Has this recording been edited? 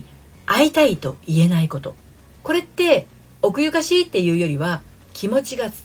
yes; 1 cut; at 2.4 s

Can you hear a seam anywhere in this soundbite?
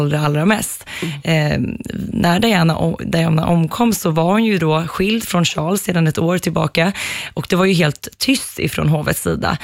no; 0 cuts

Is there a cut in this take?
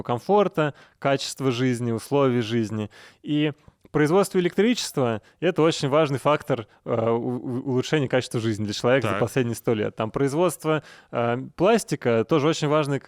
no; 0 cuts

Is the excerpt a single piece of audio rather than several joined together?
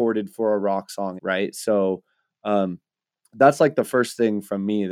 no; 1 cut; at 1.2 s

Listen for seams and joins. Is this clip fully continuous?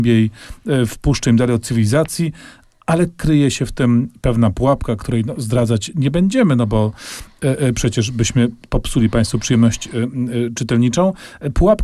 yes; 0 cuts

